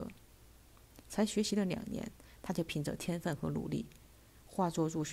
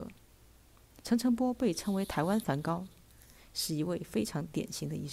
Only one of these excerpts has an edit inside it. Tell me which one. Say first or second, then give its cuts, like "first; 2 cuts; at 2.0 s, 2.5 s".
second; 1 cut; at 1.0 s